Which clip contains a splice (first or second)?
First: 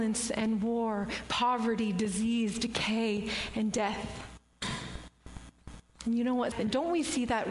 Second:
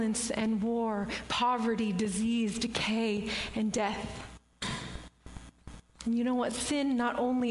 first